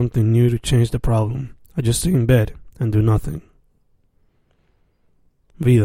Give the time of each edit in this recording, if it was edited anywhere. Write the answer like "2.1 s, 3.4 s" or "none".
none